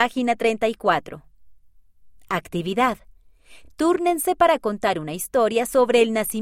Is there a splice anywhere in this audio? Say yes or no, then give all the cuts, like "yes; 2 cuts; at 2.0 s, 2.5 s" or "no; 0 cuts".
no; 0 cuts